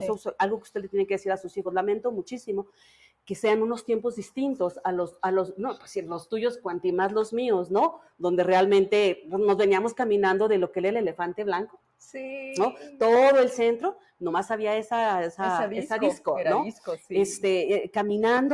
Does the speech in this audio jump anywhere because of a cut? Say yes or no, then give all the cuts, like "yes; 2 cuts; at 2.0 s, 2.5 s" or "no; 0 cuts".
no; 0 cuts